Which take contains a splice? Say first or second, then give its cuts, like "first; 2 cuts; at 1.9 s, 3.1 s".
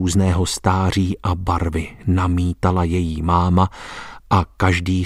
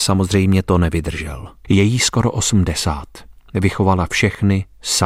second; 1 cut; at 1.6 s